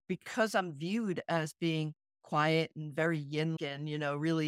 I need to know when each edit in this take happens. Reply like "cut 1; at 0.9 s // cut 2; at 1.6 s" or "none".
cut 1; at 3.6 s